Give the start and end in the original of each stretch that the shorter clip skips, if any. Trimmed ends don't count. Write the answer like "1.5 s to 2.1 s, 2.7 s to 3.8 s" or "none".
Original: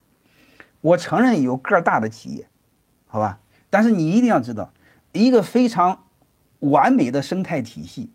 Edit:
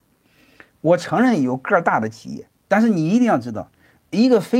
2.6 s to 3.7 s

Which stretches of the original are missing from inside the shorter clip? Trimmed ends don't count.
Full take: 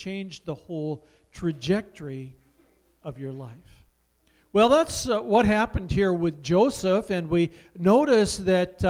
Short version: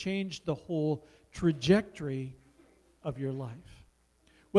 none

